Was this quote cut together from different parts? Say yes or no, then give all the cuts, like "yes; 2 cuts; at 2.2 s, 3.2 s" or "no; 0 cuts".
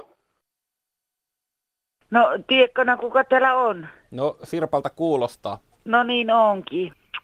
no; 0 cuts